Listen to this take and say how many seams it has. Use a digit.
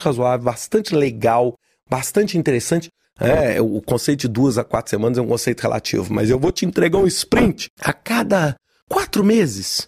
2